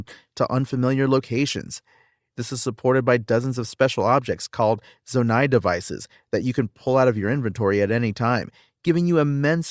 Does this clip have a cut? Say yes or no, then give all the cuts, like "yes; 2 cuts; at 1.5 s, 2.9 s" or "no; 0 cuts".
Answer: yes; 1 cut; at 2.2 s